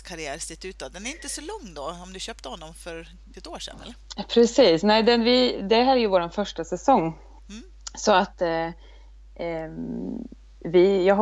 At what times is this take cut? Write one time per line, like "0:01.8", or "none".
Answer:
none